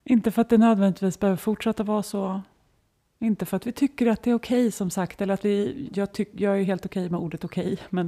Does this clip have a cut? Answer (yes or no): yes